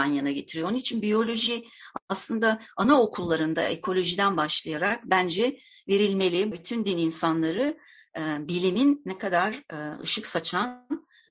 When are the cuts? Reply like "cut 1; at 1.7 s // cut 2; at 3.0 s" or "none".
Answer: cut 1; at 6.5 s